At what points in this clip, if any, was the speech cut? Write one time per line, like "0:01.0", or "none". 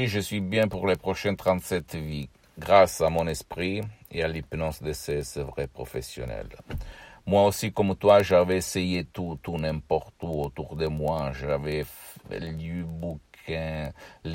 none